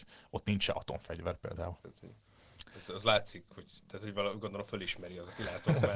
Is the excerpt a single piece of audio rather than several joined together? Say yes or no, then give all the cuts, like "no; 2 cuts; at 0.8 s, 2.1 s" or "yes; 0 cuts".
no; 1 cut; at 1.8 s